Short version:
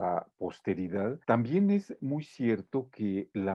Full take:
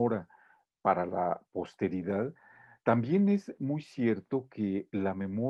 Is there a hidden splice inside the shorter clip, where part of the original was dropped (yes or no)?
yes